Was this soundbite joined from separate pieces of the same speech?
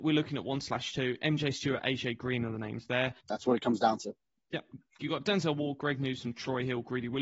yes; 1 cut; at 3.2 s

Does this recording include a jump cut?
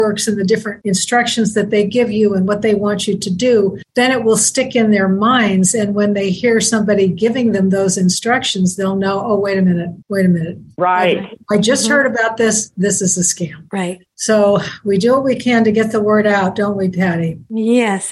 no; 0 cuts

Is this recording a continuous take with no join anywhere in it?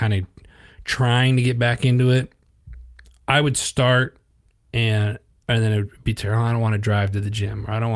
yes; 0 cuts

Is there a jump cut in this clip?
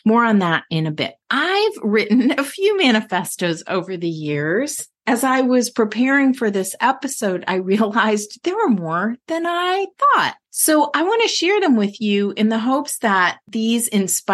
yes; 1 cut; at 1.2 s

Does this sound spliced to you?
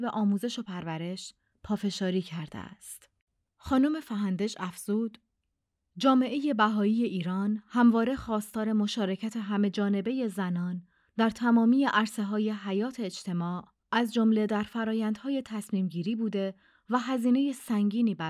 yes; 1 cut; at 3.4 s

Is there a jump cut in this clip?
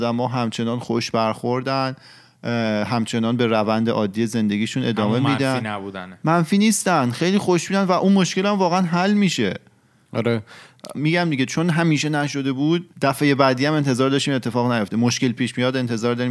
yes; 2 cuts; at 10.9 s, 12.9 s

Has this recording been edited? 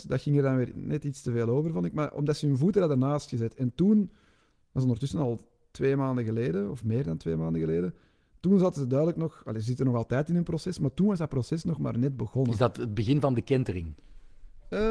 no; 0 cuts

